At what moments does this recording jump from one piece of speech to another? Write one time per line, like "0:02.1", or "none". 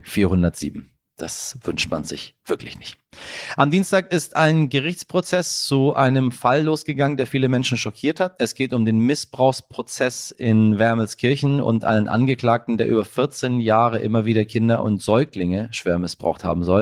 none